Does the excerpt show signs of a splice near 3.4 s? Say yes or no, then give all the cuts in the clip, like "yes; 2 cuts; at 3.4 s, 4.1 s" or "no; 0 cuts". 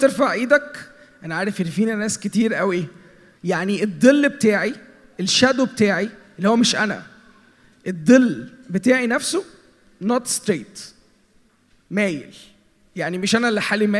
yes; 1 cut; at 3.4 s